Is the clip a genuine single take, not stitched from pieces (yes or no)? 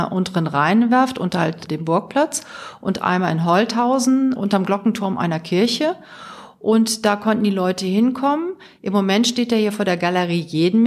yes